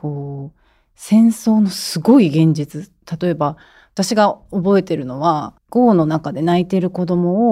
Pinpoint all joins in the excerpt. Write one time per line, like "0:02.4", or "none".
0:05.6